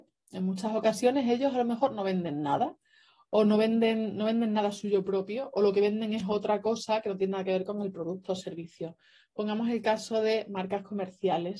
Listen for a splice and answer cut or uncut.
uncut